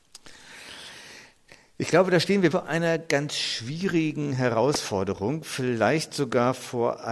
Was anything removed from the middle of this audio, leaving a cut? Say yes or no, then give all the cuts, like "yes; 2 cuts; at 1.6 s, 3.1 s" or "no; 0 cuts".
yes; 1 cut; at 2.5 s